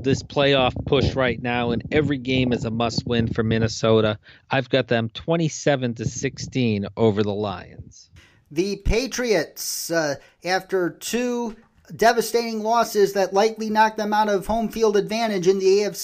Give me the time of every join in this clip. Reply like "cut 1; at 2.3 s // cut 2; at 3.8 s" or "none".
none